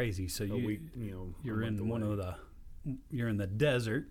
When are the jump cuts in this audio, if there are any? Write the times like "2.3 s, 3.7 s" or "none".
none